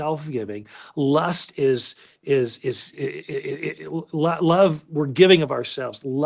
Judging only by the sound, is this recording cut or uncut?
cut